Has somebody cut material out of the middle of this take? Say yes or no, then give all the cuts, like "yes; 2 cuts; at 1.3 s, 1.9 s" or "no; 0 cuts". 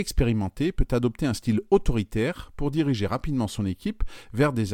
no; 0 cuts